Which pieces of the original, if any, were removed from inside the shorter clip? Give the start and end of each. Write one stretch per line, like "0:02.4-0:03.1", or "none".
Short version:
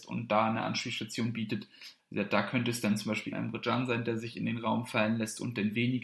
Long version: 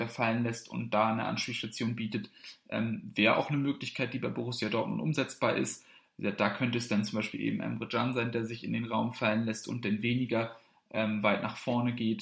0:02.6-0:06.1
0:07.4-0:07.6